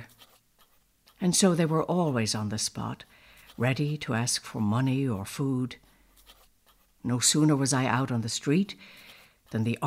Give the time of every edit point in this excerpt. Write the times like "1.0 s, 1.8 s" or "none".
1.0 s